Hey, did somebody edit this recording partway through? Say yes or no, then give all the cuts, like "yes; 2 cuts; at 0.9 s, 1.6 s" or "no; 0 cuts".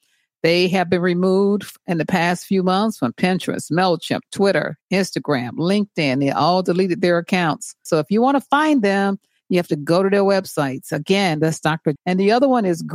yes; 2 cuts; at 7.9 s, 12.0 s